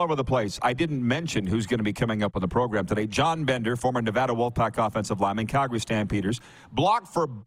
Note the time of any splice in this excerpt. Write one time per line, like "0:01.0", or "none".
none